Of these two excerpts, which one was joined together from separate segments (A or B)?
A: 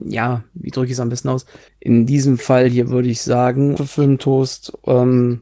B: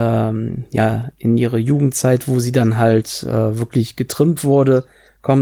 A